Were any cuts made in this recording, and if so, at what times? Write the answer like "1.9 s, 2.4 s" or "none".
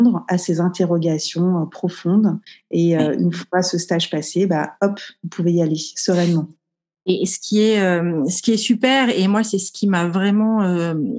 none